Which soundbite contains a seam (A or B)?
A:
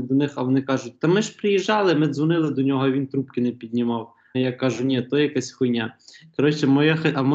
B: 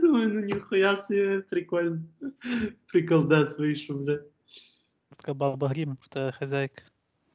A